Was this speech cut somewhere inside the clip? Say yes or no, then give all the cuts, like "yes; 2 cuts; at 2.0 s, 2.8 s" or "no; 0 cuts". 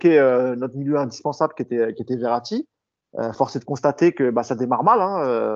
no; 0 cuts